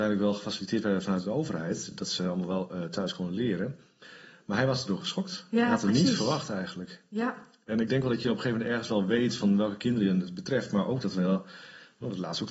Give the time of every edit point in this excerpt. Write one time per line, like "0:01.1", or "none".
none